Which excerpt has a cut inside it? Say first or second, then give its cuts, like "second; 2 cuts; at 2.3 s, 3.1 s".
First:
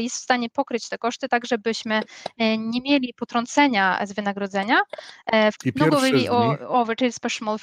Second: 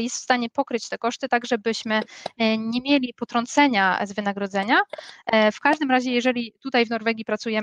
first; 1 cut; at 5.5 s